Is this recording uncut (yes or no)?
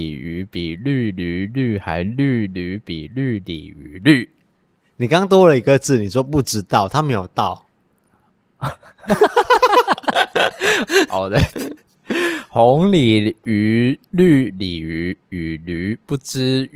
no